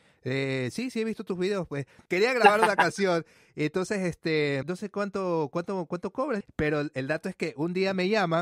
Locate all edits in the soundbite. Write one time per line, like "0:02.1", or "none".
0:04.6
0:06.4